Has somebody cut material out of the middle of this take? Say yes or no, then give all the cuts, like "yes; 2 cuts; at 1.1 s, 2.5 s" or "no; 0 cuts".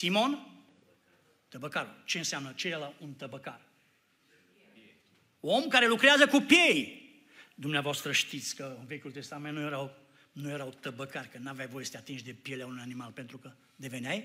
no; 0 cuts